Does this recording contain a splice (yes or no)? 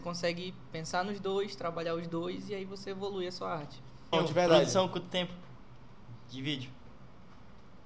yes